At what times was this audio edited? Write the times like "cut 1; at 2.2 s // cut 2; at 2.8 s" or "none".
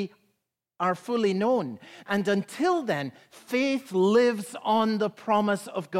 cut 1; at 2.0 s